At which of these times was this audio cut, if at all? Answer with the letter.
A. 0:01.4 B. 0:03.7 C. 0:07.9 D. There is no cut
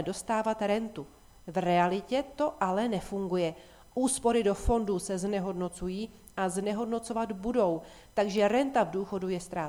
D